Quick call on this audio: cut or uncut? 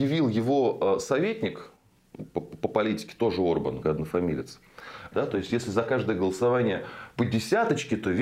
cut